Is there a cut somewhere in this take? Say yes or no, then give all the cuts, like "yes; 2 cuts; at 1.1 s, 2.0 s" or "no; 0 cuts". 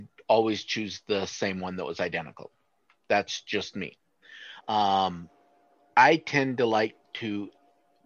yes; 1 cut; at 4.6 s